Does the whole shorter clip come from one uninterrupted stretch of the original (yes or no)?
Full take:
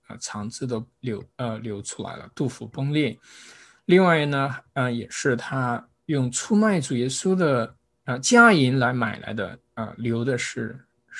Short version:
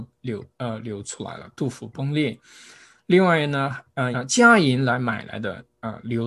no